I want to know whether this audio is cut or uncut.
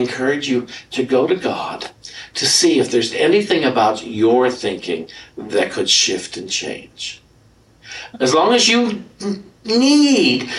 cut